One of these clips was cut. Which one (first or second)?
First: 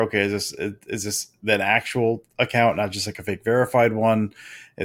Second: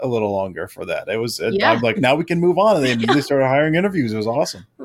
second